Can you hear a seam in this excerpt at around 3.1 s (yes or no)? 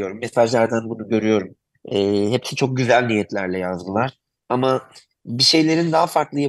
no